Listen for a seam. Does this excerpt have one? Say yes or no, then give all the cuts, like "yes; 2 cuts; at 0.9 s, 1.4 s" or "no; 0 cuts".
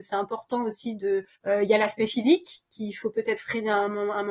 yes; 1 cut; at 1.3 s